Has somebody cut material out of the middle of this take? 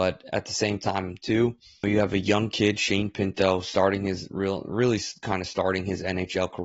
yes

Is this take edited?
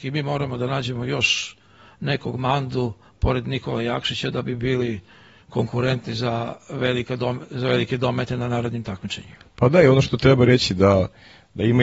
no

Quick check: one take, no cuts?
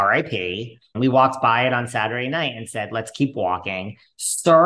no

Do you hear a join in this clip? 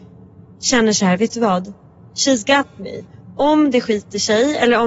no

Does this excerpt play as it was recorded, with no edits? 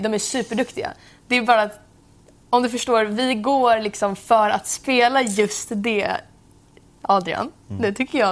yes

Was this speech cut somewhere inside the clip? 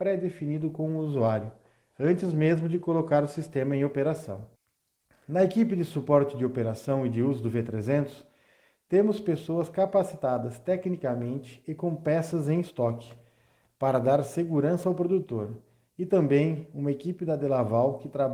no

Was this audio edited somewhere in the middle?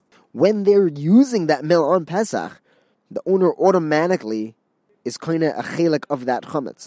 no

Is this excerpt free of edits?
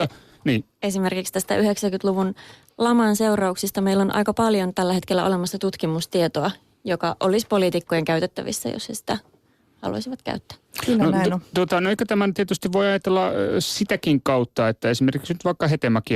yes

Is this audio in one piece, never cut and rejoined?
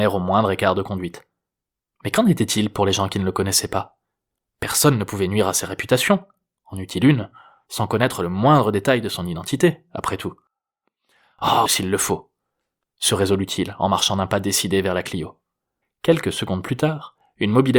no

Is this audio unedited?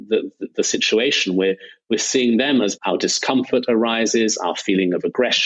no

